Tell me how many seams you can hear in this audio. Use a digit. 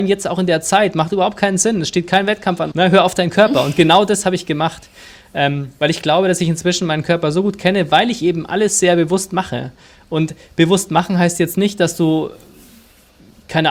1